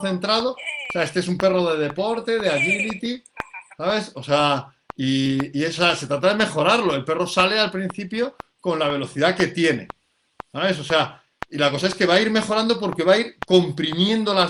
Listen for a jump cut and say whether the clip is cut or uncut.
uncut